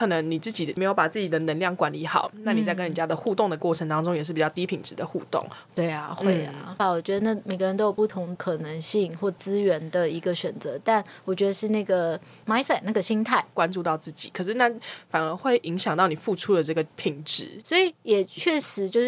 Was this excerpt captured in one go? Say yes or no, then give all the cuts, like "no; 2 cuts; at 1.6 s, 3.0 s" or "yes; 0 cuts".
no; 3 cuts; at 6.8 s, 13.5 s, 17.6 s